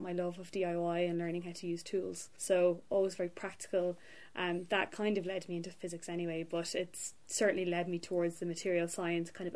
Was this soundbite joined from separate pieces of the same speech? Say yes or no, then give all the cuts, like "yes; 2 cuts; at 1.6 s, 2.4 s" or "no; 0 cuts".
no; 0 cuts